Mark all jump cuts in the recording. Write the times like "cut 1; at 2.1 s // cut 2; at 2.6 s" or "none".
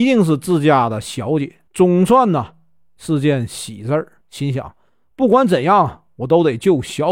cut 1; at 1.7 s // cut 2; at 4.2 s